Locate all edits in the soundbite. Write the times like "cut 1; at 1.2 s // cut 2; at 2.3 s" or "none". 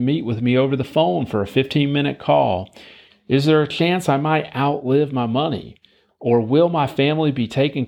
cut 1; at 3.1 s